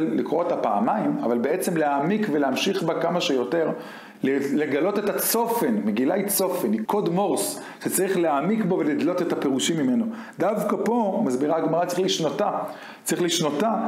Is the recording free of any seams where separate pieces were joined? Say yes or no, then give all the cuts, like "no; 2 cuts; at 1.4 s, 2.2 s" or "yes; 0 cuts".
no; 1 cut; at 6.9 s